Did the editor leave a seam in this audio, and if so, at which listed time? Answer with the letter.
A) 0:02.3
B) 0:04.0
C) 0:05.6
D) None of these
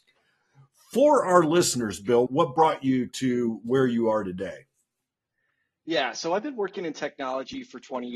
A